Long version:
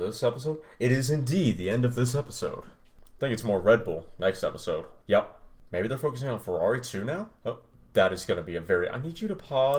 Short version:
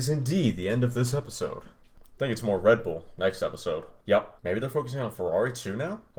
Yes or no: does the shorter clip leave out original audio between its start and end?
yes